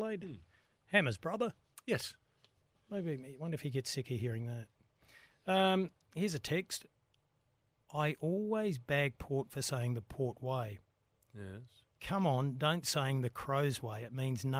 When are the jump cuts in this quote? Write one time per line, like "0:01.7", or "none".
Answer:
none